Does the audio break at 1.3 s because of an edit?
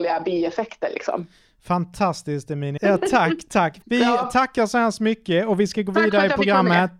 no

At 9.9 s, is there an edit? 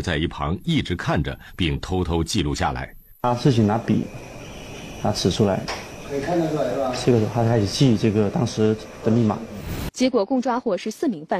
yes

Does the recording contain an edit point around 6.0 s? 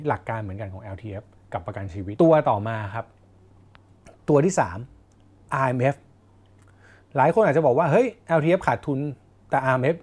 no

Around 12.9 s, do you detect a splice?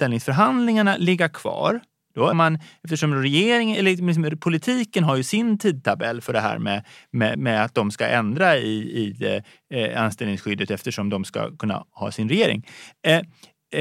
no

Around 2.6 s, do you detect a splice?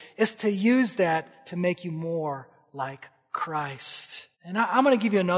no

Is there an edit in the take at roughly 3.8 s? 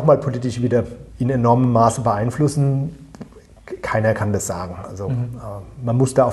no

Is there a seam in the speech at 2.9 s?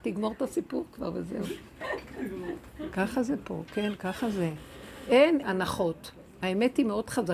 no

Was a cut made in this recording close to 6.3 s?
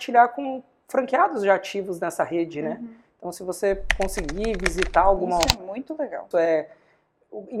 yes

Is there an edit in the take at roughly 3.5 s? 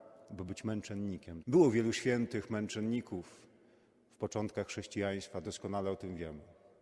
no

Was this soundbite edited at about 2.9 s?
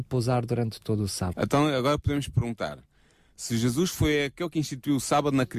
no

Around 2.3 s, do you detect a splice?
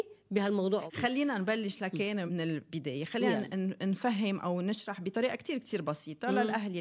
yes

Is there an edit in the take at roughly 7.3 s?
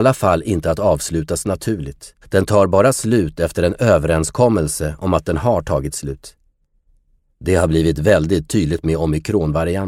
no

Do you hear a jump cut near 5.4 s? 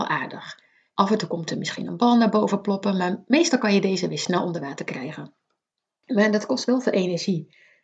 no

